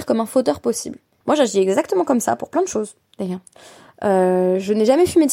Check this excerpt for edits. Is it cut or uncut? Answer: cut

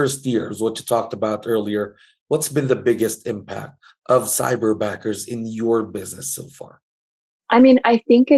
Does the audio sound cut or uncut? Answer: uncut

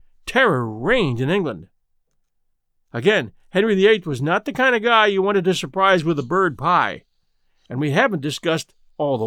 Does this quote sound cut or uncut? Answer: uncut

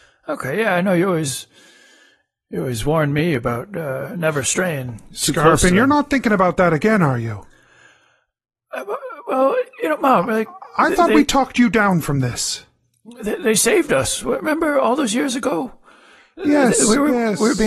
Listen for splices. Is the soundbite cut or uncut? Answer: uncut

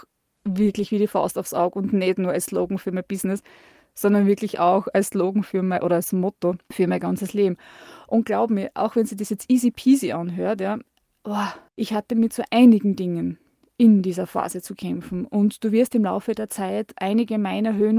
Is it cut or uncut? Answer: uncut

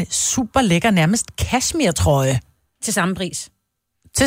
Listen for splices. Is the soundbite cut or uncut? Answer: uncut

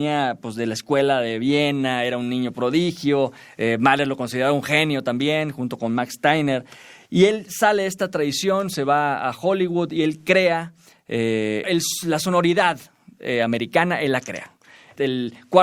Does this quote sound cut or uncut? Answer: cut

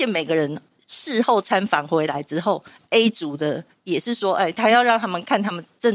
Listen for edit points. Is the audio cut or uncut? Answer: uncut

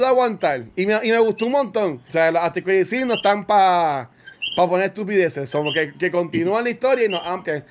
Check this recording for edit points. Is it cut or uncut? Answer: cut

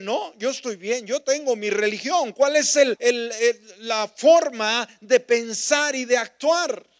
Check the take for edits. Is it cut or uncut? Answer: cut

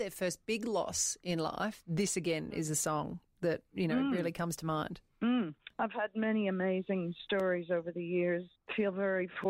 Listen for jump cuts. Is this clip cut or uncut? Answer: uncut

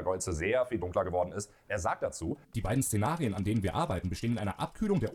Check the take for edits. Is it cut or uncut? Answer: cut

